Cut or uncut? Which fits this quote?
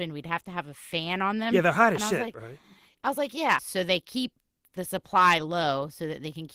cut